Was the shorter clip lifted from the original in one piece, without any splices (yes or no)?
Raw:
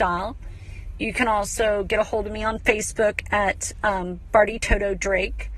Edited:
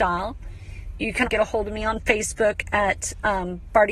no